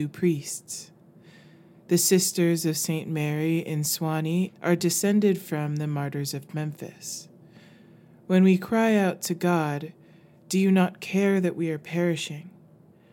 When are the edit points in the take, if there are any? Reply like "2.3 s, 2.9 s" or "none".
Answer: 4.5 s